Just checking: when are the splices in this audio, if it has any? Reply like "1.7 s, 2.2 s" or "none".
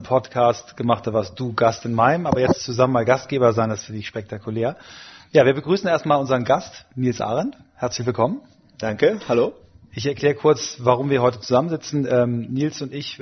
none